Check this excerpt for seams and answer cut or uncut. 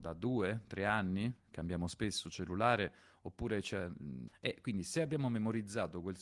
cut